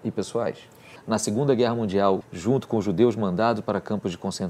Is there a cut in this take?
yes; 2 cuts; at 1.0 s, 2.2 s

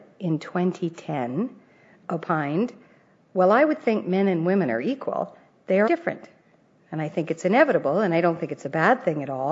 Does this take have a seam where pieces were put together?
yes; 1 cut; at 5.8 s

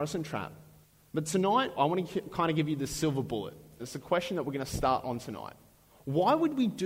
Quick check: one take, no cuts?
no; 2 cuts; at 1.8 s, 3.8 s

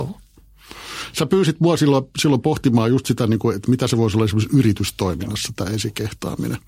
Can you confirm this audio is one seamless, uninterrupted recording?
yes; 0 cuts

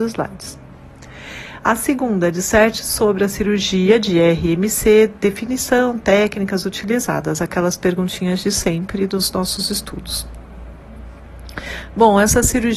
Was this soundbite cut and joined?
no; 0 cuts

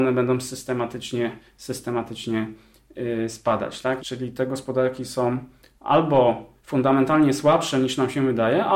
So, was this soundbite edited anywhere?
yes; 2 cuts; at 4.0 s, 6.6 s

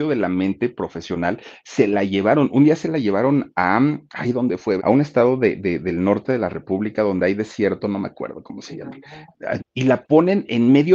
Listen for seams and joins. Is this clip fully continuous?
no; 2 cuts; at 4.8 s, 9.6 s

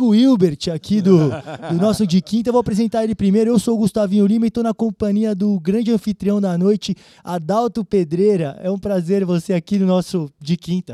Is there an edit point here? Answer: no; 0 cuts

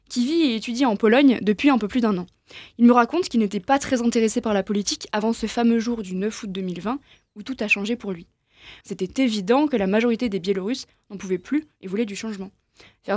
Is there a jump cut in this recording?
yes; 1 cut; at 8.8 s

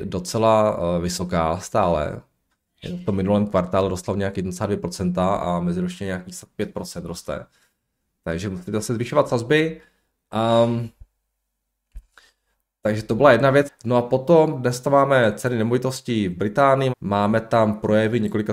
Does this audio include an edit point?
yes; 2 cuts; at 13.7 s, 16.9 s

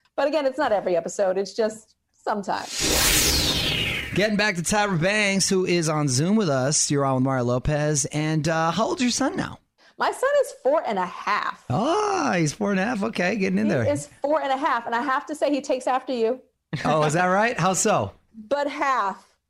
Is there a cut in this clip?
no; 0 cuts

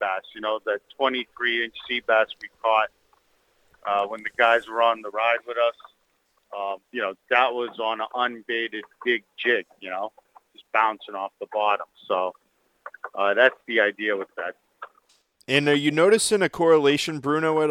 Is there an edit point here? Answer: yes; 1 cut; at 6.8 s

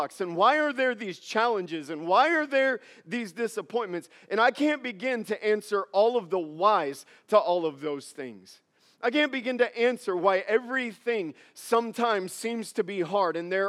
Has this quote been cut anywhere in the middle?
no; 0 cuts

